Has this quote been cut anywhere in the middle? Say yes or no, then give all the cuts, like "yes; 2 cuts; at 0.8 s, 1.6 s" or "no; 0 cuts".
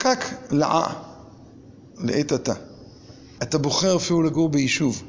yes; 1 cut; at 3.4 s